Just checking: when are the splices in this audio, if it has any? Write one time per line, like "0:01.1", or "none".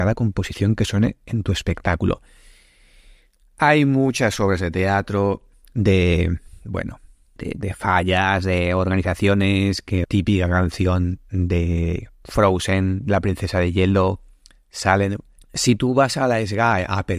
0:07.4
0:10.0
0:15.4